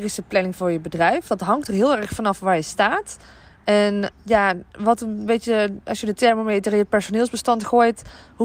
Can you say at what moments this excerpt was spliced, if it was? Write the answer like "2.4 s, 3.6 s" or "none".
4.1 s